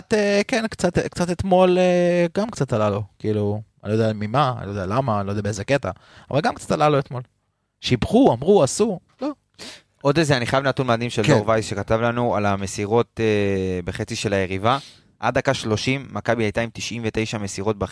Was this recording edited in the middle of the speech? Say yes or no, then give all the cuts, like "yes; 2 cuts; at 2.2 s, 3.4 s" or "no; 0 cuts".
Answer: no; 0 cuts